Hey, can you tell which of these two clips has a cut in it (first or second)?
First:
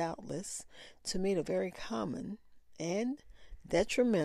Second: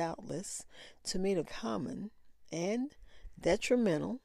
second